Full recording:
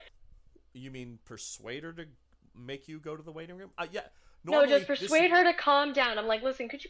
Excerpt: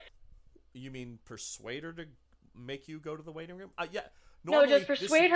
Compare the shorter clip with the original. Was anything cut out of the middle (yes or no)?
no